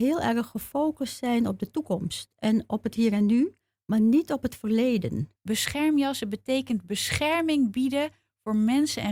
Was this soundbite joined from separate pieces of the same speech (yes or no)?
yes